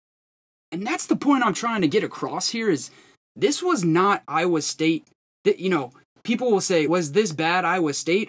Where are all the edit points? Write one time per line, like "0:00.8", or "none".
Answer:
0:01.9
0:06.9